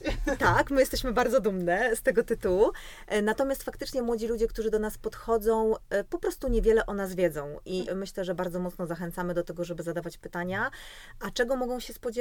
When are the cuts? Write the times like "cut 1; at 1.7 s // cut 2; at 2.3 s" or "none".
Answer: cut 1; at 7.9 s